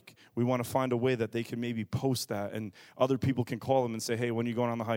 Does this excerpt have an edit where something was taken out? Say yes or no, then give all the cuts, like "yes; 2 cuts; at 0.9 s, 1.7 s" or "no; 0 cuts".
no; 0 cuts